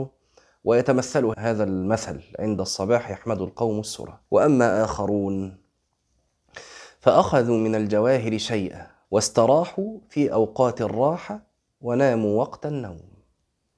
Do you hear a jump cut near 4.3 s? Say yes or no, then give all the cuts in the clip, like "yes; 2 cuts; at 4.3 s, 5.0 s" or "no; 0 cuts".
yes; 3 cuts; at 1.3 s, 4.3 s, 9.0 s